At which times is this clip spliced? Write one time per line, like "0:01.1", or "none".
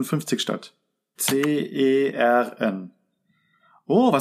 0:01.1